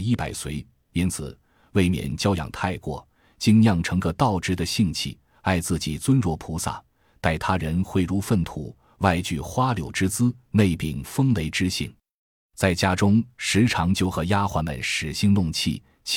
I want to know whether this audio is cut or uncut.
uncut